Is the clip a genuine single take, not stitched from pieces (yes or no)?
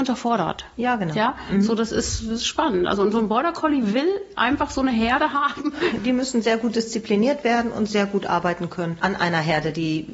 yes